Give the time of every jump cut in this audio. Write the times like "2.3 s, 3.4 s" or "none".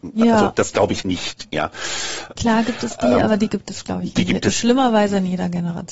1.0 s, 2.4 s

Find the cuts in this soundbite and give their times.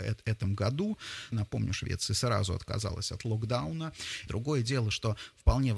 1.3 s, 4.3 s

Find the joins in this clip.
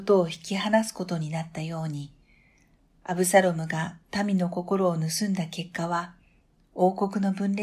none

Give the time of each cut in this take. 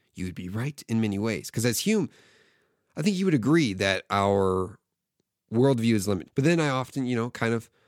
6.3 s

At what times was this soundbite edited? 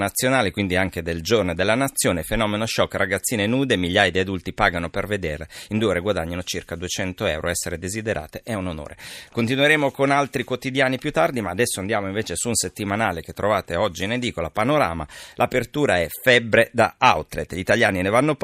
none

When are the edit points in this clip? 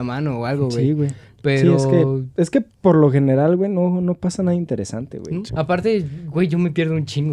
5.5 s

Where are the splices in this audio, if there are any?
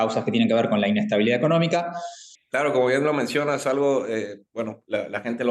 2.3 s

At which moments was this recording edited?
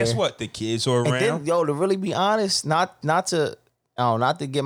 none

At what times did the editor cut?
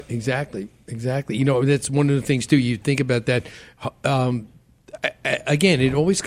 none

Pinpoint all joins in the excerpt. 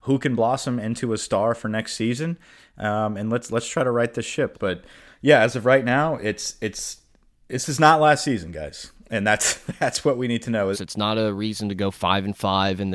4.5 s, 10.7 s

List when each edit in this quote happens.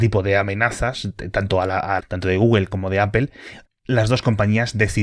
2.0 s, 3.6 s

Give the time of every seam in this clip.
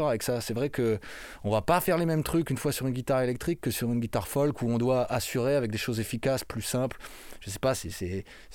none

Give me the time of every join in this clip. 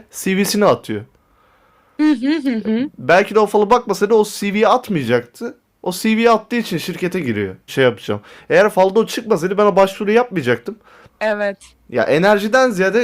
7.7 s, 11.1 s

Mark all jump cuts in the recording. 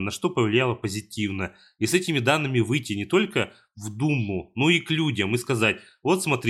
none

